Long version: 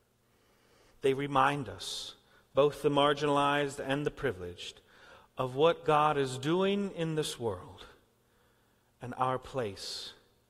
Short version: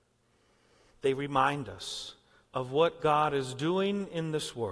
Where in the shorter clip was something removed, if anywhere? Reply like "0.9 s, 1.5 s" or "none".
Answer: 2.5 s